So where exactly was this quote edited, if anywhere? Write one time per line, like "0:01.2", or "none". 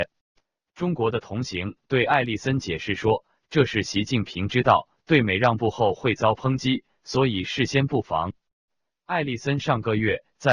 none